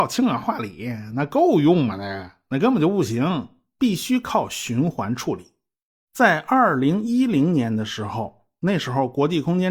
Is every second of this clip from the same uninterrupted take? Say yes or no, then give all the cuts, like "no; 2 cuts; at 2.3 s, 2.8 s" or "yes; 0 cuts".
yes; 0 cuts